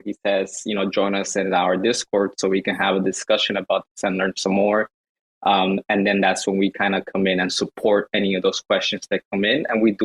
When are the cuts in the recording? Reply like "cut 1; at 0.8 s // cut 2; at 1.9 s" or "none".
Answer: none